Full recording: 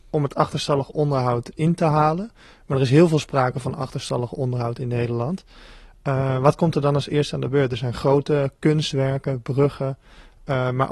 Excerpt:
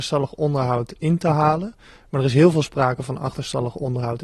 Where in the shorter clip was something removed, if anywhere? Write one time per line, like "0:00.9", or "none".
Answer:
none

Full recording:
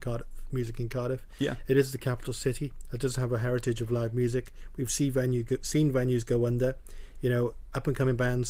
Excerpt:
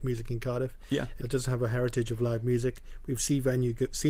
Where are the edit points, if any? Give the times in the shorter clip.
0:01.2

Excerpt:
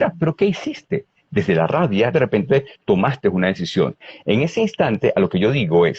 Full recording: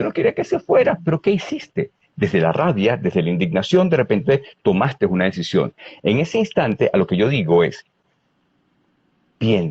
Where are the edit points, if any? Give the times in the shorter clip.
0:02.1

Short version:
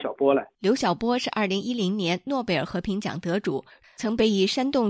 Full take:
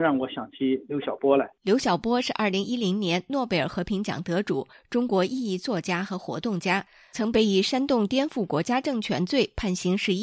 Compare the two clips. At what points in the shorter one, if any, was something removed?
0:03.8

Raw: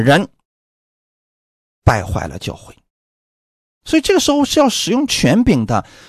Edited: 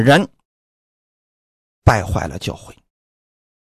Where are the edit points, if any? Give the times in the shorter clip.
none

